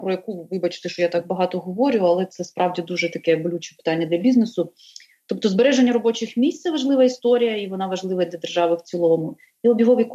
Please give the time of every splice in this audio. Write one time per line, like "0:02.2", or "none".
none